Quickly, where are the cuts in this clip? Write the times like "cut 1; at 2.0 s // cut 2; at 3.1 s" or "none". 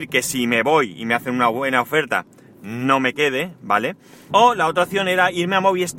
cut 1; at 4.3 s